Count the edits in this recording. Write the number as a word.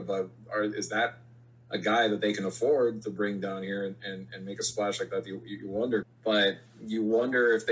one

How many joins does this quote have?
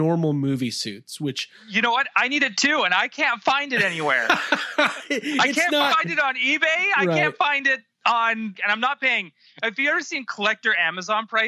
one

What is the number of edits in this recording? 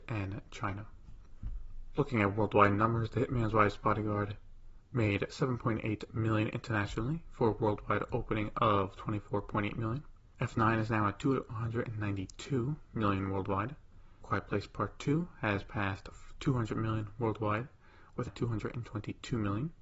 one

